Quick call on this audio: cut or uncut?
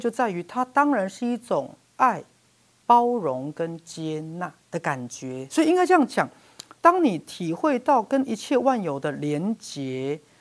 cut